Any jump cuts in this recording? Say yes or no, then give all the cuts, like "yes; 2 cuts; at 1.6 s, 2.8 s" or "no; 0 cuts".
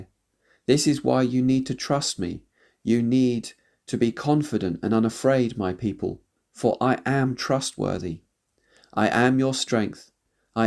no; 0 cuts